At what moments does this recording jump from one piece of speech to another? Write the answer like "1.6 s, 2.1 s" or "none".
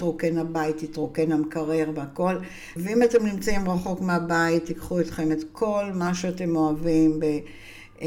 2.8 s